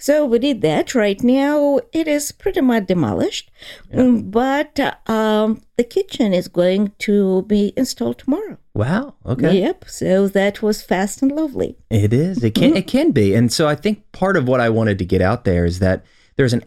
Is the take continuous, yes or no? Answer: yes